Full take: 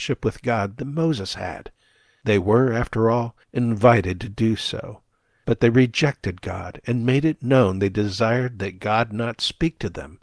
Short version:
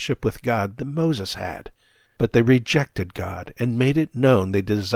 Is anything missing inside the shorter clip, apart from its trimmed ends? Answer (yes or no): yes